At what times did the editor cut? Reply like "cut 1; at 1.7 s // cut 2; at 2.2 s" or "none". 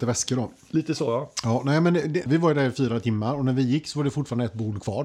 cut 1; at 2.3 s